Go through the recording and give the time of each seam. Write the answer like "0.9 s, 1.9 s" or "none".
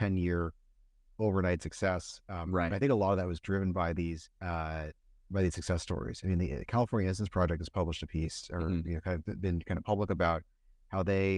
4.4 s

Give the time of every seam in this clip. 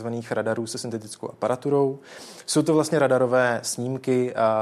none

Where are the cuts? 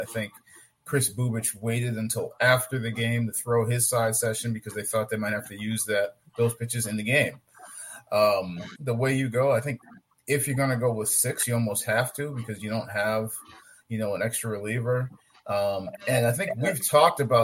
8.8 s

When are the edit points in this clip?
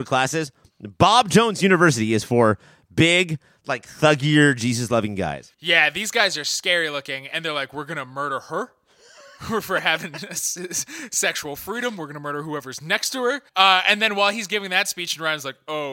5.5 s, 13.5 s

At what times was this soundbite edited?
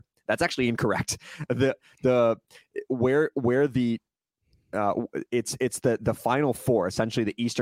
none

